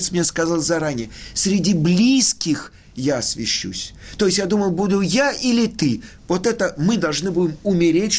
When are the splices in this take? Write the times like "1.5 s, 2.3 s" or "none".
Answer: none